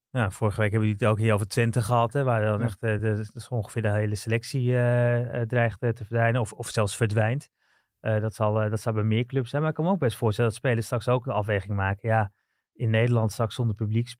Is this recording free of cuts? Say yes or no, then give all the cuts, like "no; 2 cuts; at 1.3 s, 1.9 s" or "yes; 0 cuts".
yes; 0 cuts